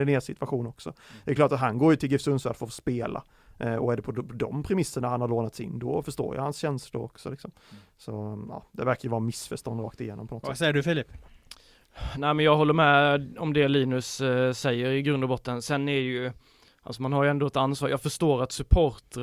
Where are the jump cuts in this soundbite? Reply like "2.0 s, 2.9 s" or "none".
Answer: none